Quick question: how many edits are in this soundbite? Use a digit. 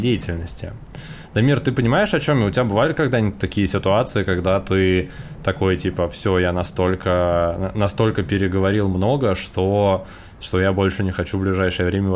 0